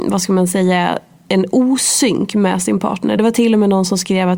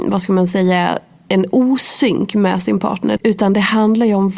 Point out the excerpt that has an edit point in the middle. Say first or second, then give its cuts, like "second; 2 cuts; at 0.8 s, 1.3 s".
second; 1 cut; at 3.2 s